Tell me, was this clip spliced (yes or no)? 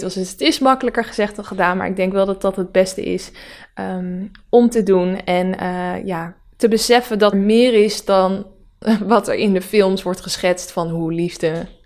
yes